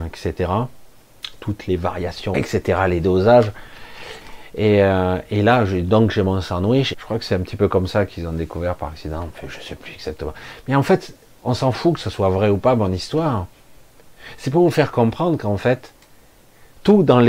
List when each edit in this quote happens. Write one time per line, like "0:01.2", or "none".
0:02.3
0:04.2
0:06.9